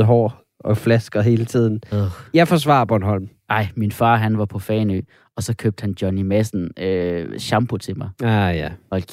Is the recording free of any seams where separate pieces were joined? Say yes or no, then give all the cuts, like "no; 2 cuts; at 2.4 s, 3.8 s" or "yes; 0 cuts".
yes; 0 cuts